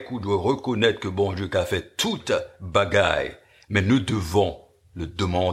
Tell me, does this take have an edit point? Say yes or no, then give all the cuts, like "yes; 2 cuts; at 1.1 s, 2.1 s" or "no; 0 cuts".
no; 0 cuts